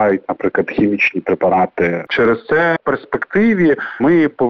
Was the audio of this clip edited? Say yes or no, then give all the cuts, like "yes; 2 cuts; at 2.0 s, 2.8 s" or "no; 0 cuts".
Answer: yes; 1 cut; at 2.1 s